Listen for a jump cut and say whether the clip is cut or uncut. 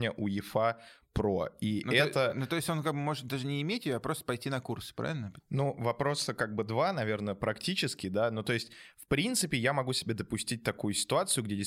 cut